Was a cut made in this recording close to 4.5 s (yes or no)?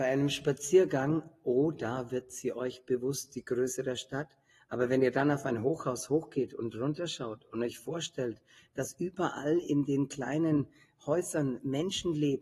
no